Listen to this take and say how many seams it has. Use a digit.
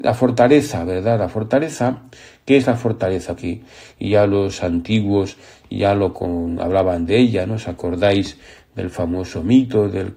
1